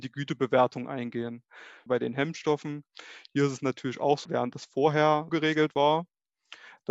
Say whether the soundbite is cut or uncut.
cut